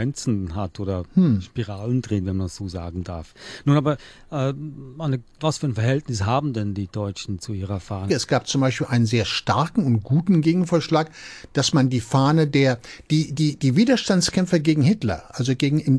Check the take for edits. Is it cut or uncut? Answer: cut